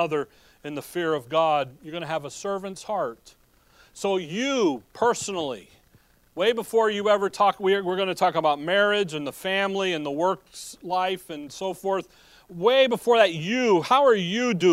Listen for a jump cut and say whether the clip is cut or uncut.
uncut